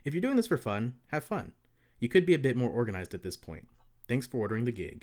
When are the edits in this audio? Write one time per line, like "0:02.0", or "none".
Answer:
none